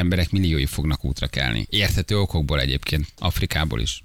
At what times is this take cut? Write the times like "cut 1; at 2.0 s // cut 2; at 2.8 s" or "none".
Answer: none